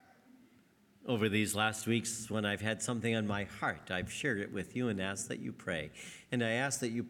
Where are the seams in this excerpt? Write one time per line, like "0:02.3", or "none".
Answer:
none

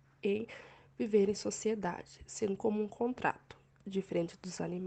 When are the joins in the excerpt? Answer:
0:02.6

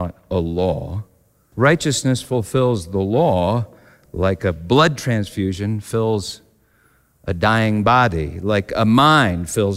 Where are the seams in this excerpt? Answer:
0:01.5

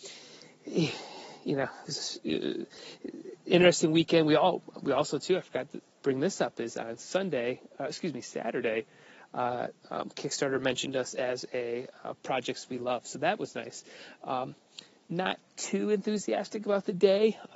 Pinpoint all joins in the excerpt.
none

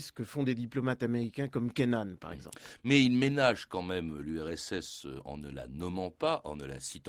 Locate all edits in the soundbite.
none

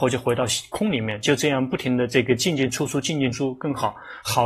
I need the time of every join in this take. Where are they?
0:03.3

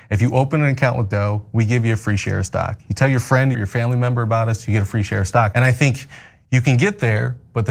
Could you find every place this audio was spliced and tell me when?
0:03.5
0:05.5

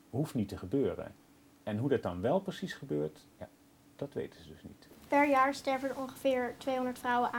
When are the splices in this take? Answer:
none

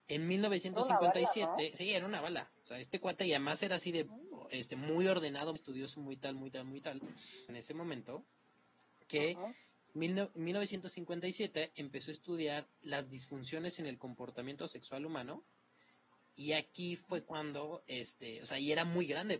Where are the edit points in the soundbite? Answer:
0:05.6
0:07.5
0:09.9

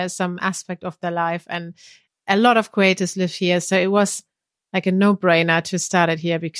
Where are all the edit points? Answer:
none

